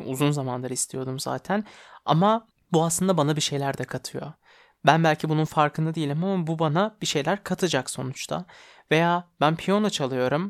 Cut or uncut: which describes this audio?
uncut